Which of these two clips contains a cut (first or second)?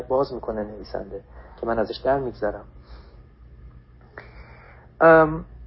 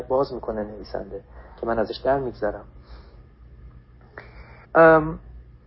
second